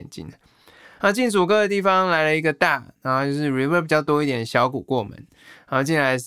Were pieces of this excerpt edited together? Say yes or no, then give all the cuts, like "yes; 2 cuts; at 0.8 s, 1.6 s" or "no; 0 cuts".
no; 0 cuts